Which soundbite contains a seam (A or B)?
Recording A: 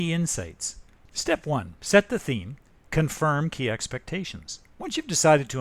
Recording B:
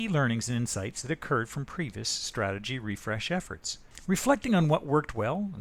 A